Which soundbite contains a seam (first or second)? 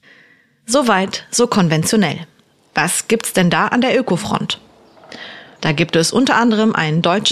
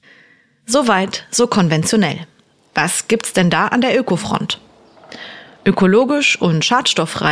first